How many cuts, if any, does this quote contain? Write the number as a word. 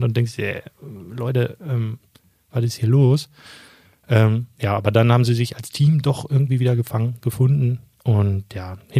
zero